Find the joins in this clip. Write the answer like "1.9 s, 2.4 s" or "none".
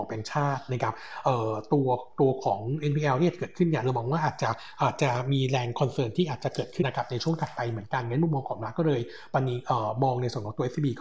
6.8 s

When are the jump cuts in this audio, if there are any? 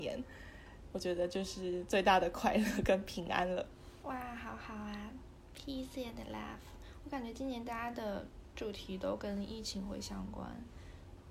4.0 s

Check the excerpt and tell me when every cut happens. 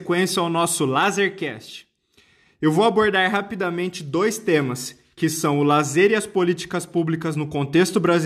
none

